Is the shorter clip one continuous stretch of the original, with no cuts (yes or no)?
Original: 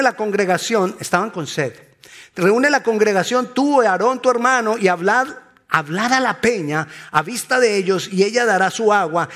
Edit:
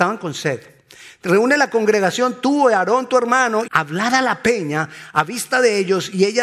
no